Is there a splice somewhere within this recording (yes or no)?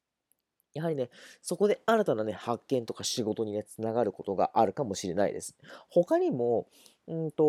no